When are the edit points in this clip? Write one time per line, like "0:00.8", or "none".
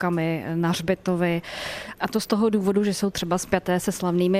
none